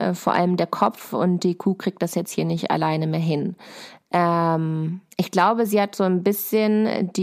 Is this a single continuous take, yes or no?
no